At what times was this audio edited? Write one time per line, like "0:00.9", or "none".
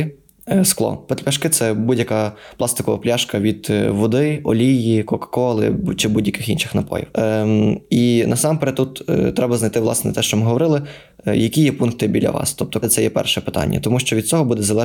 0:07.1
0:12.8